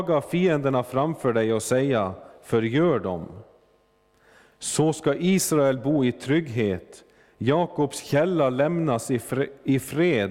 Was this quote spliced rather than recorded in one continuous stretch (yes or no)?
no